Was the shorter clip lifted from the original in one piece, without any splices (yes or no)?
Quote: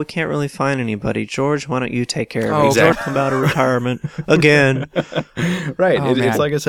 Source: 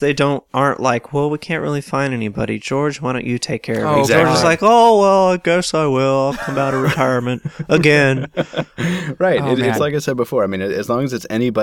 no